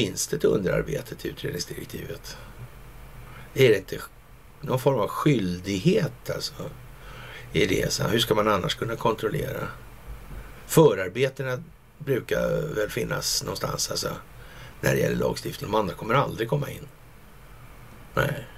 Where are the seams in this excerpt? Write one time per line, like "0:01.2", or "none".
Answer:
0:15.6